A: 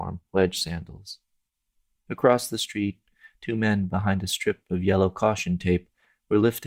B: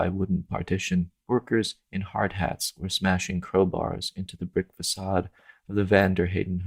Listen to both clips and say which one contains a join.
A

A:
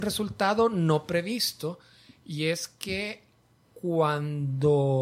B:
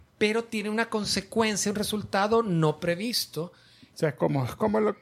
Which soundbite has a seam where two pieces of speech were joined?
B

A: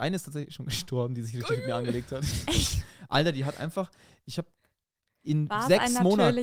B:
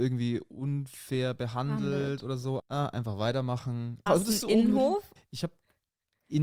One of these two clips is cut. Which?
B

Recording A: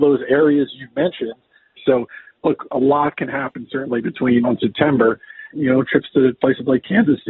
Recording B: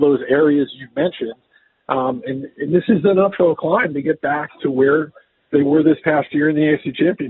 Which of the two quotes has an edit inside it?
A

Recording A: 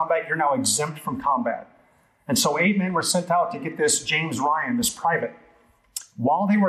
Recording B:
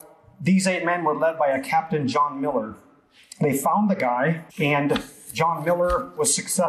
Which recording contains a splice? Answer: B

